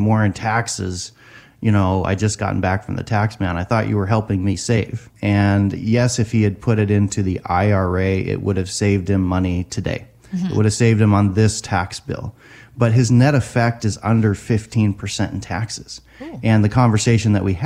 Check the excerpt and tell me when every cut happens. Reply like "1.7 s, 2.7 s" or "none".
5.1 s